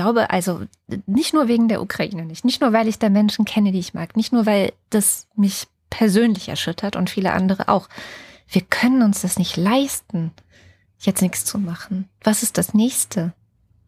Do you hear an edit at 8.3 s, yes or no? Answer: no